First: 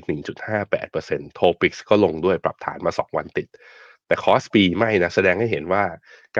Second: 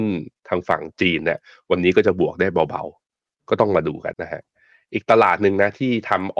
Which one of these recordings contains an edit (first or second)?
second